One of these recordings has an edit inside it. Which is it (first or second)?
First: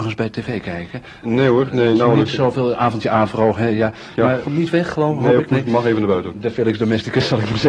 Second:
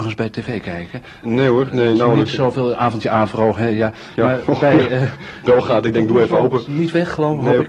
first